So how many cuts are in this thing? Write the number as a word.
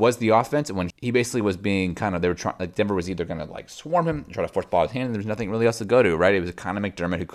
one